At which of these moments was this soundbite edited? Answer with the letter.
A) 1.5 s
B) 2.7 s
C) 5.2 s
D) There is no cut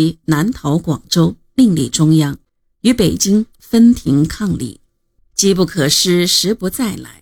C